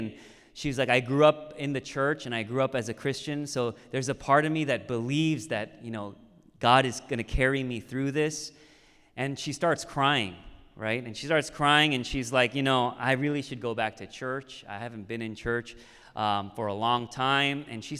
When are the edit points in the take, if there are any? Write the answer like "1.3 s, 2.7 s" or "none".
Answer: none